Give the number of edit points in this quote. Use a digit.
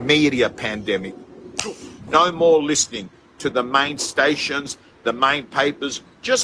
1